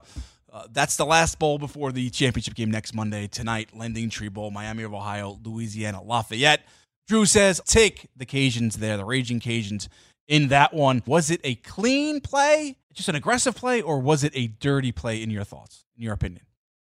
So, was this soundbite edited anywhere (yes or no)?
yes